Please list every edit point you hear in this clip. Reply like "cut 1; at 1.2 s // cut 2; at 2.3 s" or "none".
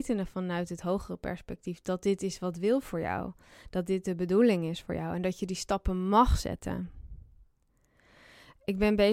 none